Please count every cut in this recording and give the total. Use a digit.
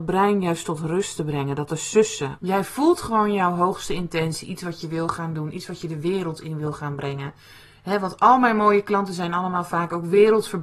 1